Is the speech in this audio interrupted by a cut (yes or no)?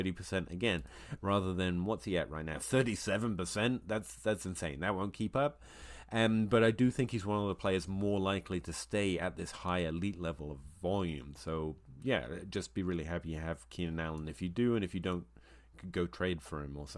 yes